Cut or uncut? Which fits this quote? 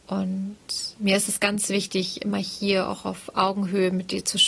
uncut